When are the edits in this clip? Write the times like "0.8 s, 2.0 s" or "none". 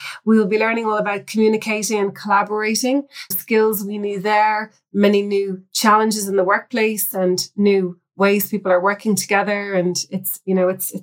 3.3 s